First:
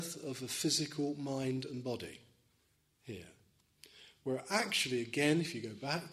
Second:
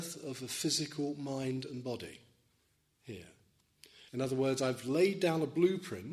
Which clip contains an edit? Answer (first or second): second